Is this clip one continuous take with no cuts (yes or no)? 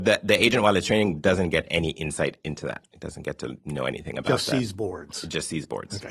yes